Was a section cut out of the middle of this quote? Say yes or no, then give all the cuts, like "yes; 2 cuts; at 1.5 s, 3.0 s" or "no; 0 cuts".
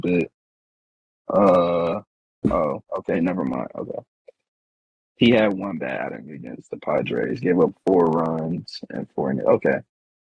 yes; 1 cut; at 2.4 s